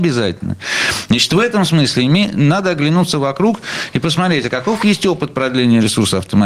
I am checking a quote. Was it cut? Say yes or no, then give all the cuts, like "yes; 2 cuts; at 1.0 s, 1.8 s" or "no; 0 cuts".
no; 0 cuts